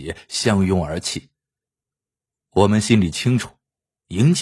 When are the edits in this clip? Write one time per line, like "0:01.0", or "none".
none